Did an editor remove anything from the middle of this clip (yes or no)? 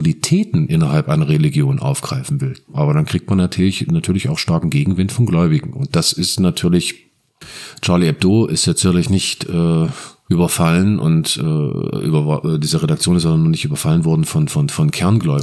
yes